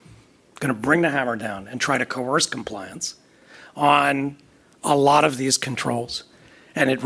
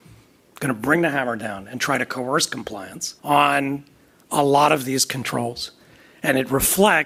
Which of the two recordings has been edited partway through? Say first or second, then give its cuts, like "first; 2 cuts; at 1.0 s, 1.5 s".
second; 1 cut; at 3.2 s